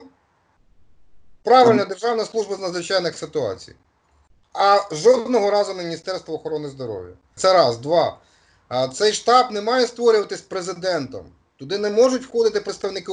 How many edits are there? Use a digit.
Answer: 1